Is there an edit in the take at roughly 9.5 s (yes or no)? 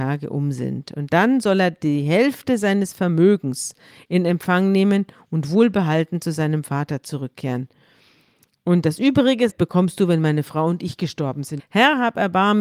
yes